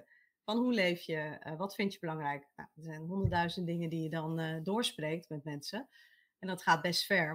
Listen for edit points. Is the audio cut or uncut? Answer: uncut